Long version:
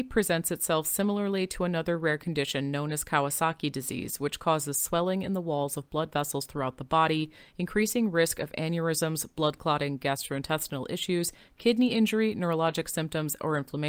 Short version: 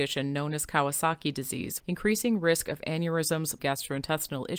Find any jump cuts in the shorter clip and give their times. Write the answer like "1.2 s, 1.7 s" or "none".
1.8 s, 3.6 s